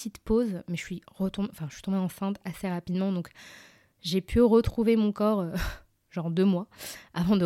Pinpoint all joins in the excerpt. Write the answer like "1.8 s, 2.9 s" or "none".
none